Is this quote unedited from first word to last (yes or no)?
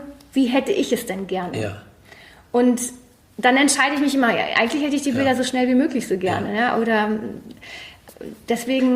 yes